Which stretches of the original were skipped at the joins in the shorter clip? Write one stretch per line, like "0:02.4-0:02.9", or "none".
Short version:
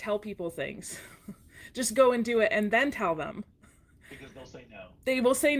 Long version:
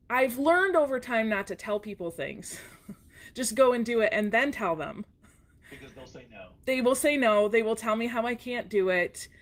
none